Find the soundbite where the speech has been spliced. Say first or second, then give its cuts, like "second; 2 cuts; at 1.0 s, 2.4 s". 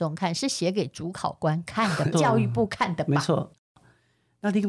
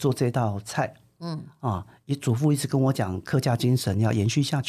first; 2 cuts; at 2.1 s, 3.5 s